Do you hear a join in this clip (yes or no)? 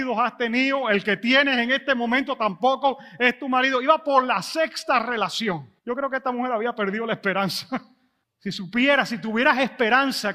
yes